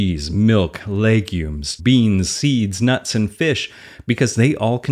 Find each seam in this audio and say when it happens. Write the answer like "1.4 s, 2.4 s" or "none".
1.8 s